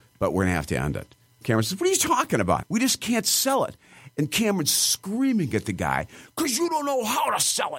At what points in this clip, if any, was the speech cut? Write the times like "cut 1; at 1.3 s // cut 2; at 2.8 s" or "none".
cut 1; at 2.6 s